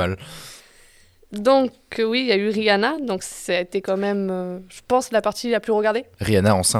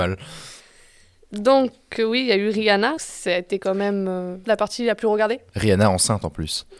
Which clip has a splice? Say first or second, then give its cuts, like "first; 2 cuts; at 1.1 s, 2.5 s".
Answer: second; 2 cuts; at 3.0 s, 4.4 s